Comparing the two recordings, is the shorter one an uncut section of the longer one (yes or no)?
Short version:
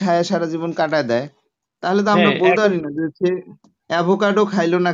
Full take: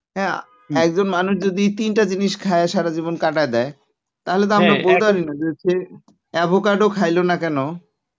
yes